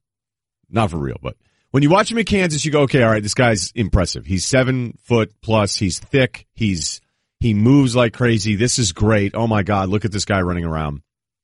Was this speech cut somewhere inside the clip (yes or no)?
no